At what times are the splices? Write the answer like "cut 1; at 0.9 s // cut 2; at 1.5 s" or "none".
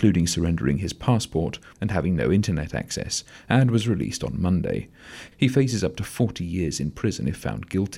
cut 1; at 1.7 s // cut 2; at 5.3 s